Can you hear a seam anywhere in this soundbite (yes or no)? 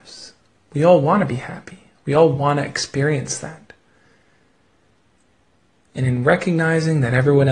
no